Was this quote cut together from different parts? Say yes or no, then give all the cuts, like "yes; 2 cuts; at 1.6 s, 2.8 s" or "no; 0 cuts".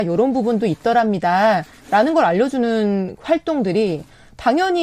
no; 0 cuts